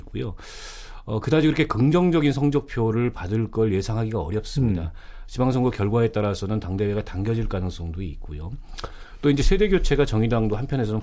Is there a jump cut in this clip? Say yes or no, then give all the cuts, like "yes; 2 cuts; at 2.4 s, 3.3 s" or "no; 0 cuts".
yes; 1 cut; at 5.2 s